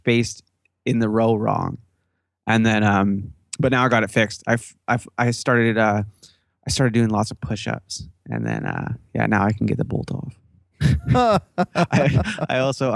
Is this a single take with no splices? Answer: yes; 0 cuts

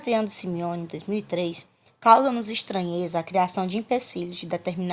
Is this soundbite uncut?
no; 1 cut; at 1.9 s

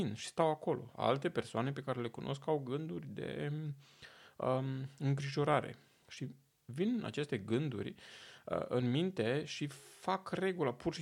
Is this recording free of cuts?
no; 1 cut; at 6.0 s

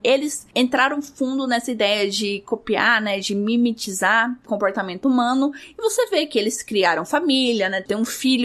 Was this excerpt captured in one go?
yes; 0 cuts

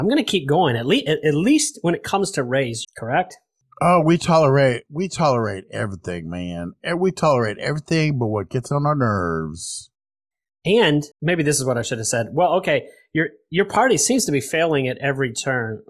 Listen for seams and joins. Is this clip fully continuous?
no; 2 cuts; at 2.8 s, 11.1 s

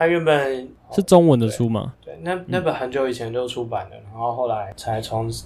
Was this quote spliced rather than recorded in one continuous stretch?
yes; 1 cut; at 1.9 s

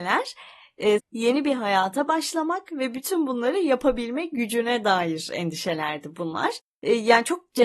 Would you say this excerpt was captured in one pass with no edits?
no; 1 cut; at 1.0 s

